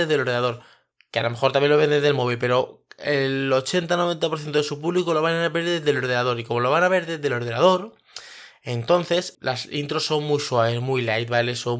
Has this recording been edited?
yes; 1 cut; at 9.3 s

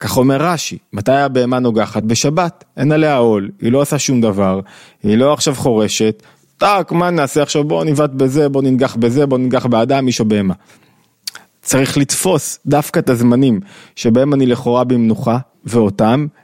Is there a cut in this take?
no; 0 cuts

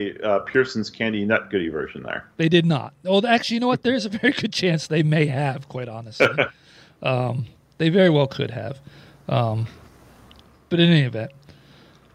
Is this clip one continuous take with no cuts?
yes; 0 cuts

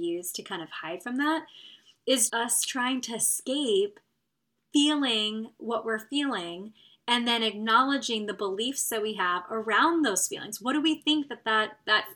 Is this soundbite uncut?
no; 1 cut; at 2.3 s

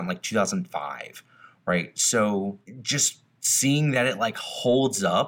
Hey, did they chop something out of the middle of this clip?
no; 0 cuts

